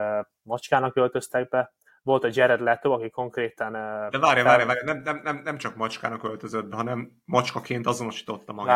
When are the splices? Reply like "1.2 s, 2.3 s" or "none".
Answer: none